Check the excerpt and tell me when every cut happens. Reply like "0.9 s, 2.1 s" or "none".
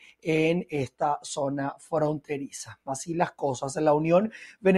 none